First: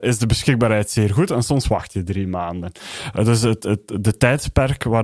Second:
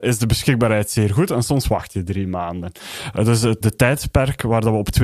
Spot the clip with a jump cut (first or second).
second